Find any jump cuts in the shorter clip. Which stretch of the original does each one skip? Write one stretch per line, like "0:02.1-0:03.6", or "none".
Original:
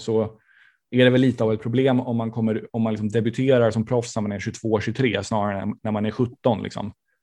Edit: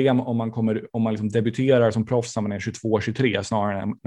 none